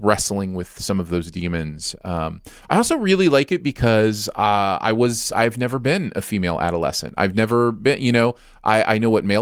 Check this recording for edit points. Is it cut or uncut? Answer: uncut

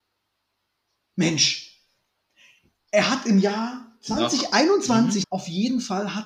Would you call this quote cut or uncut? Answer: cut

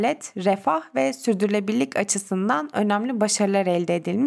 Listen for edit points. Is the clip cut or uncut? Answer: uncut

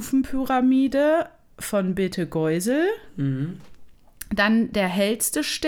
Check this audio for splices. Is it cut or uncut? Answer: uncut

